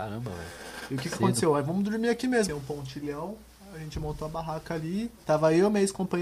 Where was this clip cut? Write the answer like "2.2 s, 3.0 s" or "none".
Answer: 2.5 s